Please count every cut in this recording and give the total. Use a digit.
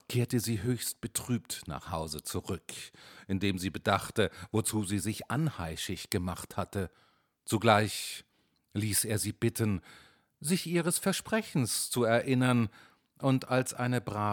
1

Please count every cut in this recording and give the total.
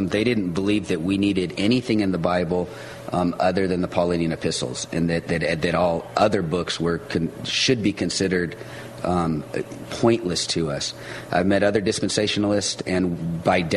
0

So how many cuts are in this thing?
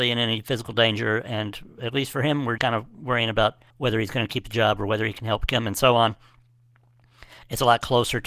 2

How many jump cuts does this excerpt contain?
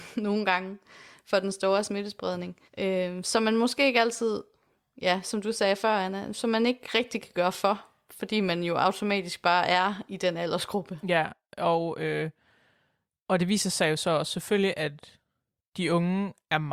1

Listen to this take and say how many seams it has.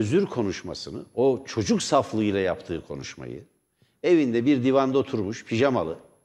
0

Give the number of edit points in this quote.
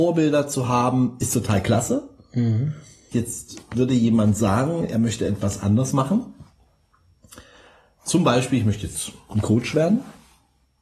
1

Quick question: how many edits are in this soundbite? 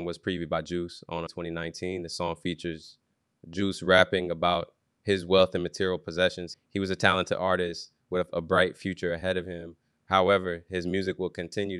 2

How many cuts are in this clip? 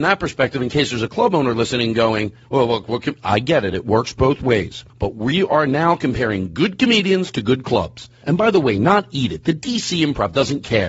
2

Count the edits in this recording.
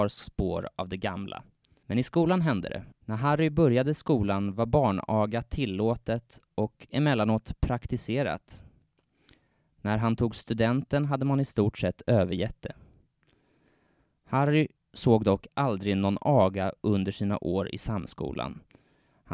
2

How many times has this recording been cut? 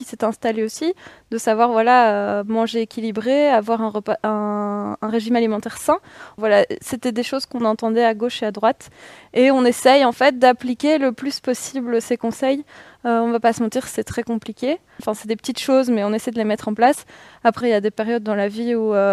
3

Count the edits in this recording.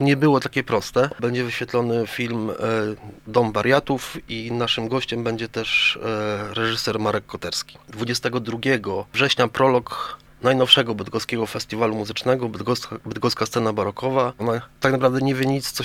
2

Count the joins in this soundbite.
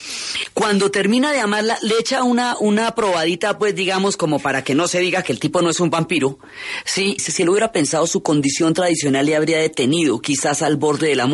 1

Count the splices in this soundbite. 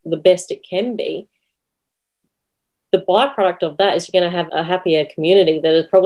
1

